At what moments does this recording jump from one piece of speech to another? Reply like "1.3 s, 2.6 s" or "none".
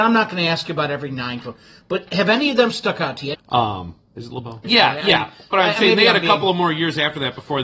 3.3 s, 4.6 s